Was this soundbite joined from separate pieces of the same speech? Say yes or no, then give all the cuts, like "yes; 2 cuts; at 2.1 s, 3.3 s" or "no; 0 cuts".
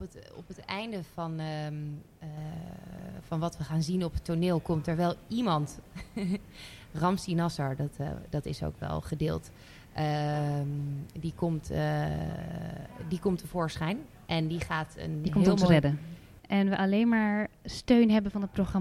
yes; 1 cut; at 16.4 s